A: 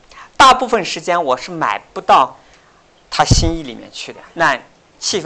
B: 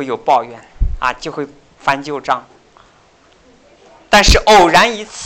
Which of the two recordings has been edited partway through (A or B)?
A